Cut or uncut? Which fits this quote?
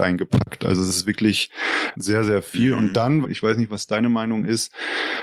cut